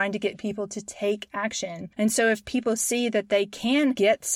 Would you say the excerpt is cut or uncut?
cut